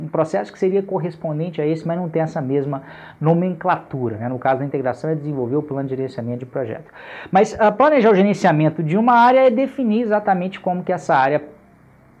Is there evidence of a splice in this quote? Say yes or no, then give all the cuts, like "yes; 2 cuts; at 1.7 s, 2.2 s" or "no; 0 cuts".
no; 0 cuts